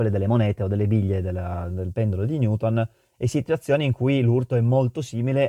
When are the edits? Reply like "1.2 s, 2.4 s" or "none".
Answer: none